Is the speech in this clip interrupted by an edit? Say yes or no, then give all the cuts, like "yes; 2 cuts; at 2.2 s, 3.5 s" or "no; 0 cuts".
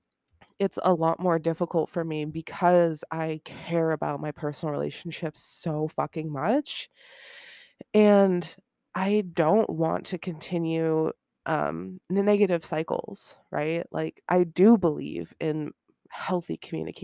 yes; 1 cut; at 14.3 s